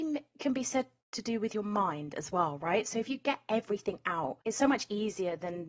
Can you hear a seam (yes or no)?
yes